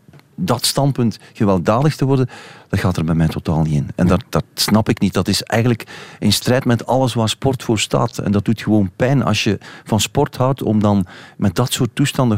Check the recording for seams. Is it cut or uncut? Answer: uncut